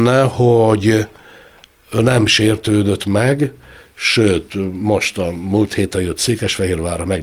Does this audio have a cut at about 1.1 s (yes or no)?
no